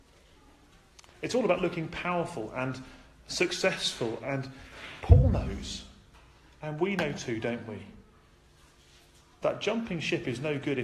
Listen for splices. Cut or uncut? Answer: uncut